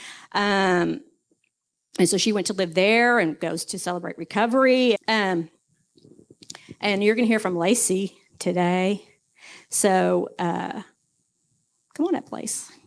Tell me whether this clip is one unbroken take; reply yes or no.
no